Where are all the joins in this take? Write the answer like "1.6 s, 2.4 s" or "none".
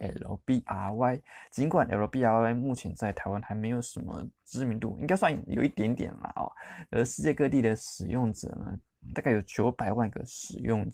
9.1 s